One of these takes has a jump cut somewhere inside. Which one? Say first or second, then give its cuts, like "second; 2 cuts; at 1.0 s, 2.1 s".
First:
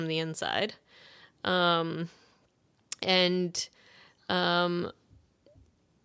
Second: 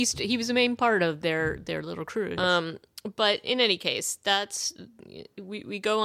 second; 1 cut; at 2.4 s